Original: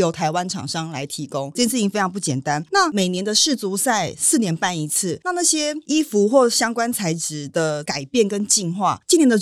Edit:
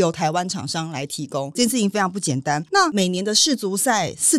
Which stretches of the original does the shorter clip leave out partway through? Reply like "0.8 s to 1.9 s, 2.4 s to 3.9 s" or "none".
none